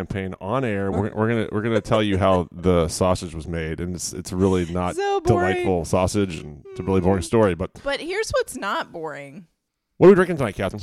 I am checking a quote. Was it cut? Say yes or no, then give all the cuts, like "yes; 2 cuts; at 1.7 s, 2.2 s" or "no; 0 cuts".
yes; 1 cut; at 0.9 s